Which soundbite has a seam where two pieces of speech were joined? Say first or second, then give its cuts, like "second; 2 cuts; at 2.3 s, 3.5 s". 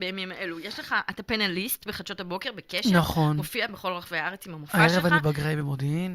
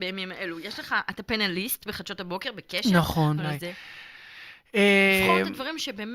second; 1 cut; at 3.4 s